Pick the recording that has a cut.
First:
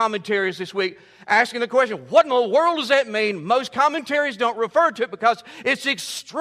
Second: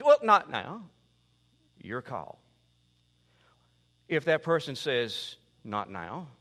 second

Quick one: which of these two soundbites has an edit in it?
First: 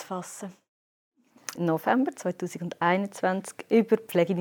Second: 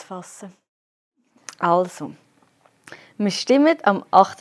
first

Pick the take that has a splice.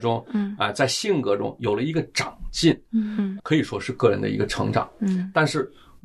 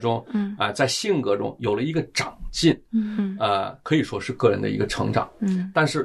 first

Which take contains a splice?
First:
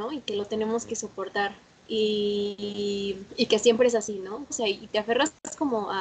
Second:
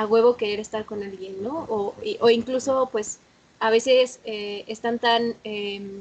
first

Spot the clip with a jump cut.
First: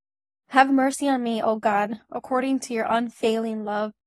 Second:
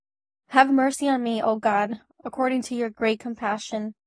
second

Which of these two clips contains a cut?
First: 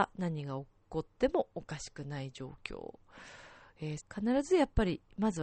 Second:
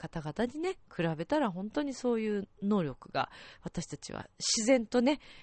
first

